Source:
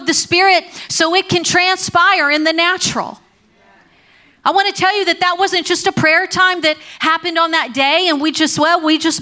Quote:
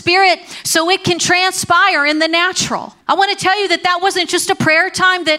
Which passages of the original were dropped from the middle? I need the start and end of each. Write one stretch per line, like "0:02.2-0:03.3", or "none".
0:03.3-0:04.4